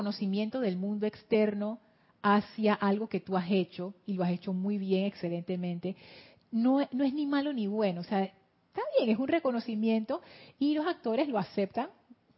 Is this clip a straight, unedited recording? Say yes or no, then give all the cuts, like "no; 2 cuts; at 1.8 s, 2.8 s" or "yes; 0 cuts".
yes; 0 cuts